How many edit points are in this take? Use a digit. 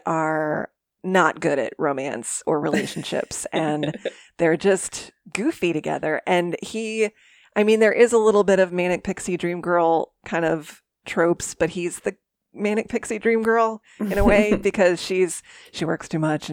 0